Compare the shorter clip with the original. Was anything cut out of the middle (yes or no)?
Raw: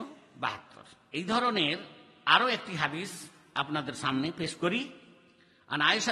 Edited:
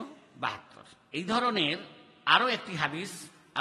no